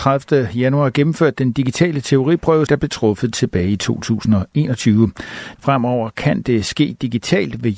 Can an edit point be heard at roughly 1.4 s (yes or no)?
no